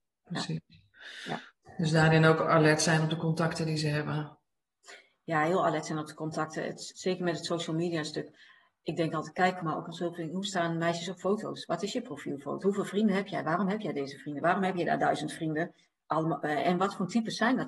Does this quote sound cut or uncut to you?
cut